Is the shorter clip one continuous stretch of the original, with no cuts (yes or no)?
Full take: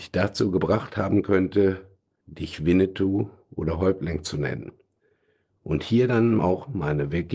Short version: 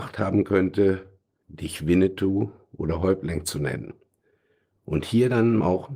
yes